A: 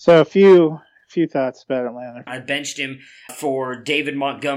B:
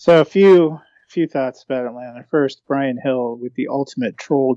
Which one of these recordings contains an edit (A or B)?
A